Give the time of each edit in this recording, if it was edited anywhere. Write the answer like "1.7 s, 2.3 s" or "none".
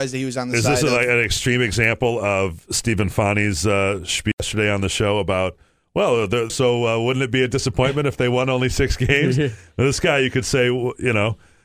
6.5 s